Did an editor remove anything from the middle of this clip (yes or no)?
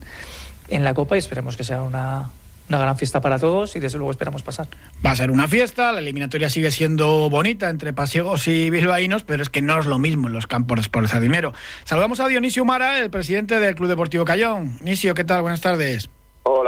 no